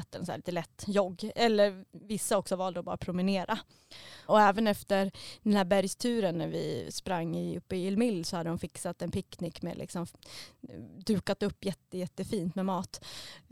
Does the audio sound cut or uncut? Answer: cut